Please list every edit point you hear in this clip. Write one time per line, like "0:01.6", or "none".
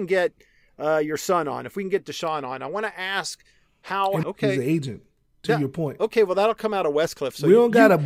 0:04.2